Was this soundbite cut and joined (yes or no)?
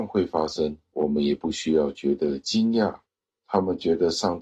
no